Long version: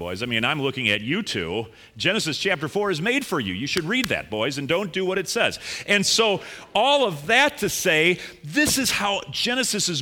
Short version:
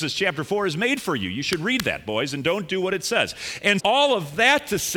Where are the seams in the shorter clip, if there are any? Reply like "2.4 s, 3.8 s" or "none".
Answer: 3.8 s